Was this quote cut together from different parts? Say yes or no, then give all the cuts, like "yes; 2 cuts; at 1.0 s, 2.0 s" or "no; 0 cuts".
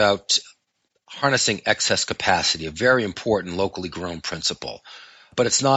no; 0 cuts